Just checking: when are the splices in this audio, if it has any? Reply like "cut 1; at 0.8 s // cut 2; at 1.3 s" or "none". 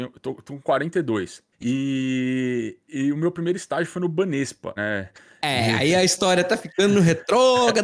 cut 1; at 1.5 s // cut 2; at 2.9 s // cut 3; at 4.8 s